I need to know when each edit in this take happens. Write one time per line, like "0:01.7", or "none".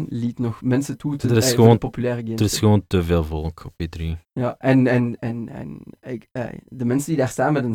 none